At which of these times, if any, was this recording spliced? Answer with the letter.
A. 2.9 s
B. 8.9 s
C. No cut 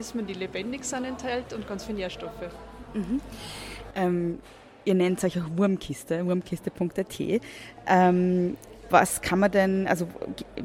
B